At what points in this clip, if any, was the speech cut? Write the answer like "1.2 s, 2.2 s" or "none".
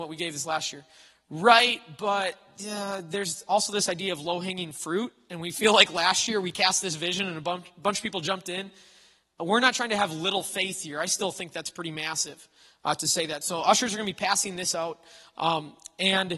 none